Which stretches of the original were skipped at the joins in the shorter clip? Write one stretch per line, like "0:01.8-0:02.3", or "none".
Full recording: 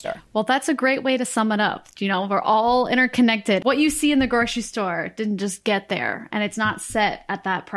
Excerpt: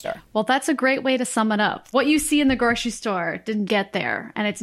0:01.9-0:03.6
0:05.4-0:05.6